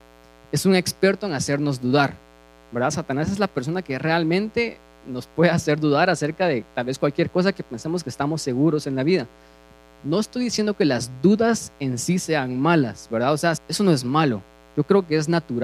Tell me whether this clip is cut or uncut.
cut